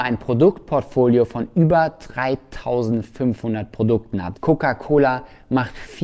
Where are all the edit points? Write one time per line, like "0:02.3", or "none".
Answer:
0:04.3